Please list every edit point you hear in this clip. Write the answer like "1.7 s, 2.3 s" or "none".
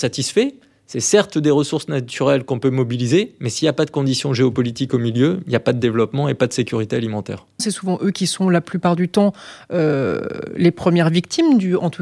7.6 s